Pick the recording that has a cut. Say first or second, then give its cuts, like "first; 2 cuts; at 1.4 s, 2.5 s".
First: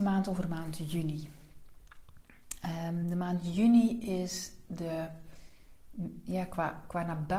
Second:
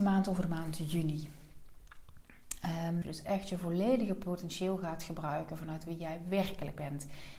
second; 1 cut; at 3.0 s